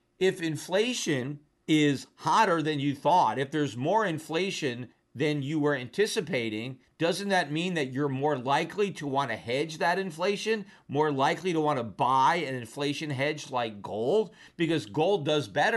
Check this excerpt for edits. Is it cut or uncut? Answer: uncut